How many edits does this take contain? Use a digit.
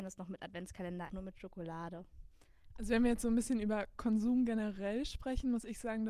2